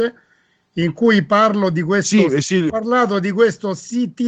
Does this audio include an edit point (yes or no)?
yes